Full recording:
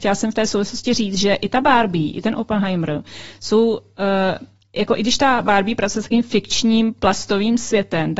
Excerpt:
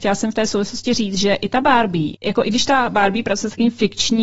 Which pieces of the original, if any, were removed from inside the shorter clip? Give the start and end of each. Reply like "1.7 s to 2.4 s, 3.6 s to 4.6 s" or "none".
2.1 s to 4.7 s